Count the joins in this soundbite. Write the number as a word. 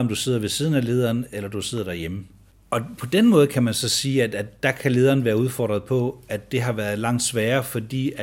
zero